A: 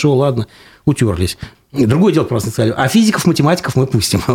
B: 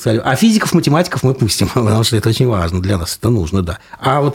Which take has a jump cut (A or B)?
A